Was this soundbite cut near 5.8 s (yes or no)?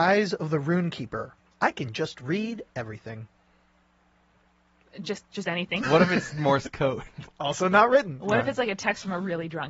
yes